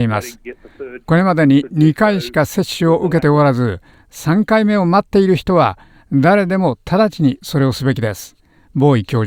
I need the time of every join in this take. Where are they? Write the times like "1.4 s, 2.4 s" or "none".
none